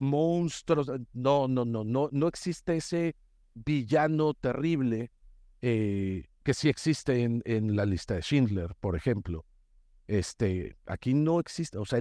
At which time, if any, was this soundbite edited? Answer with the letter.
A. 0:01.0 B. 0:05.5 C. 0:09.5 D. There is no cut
D